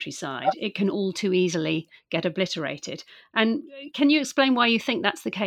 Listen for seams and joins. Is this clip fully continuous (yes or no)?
yes